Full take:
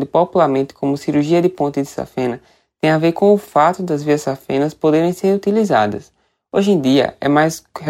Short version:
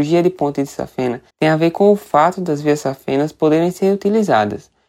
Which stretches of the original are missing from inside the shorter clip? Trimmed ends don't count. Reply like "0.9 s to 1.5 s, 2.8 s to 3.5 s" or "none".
2.5 s to 2.7 s